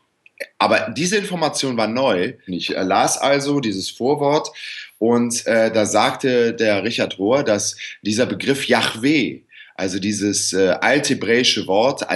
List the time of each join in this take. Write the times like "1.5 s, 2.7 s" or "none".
2.5 s